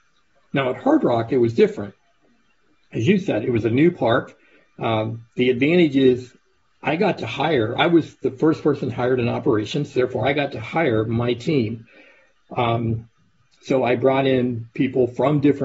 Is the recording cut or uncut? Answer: uncut